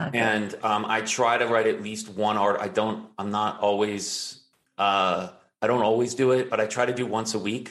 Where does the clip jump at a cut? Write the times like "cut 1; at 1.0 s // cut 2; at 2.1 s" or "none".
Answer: none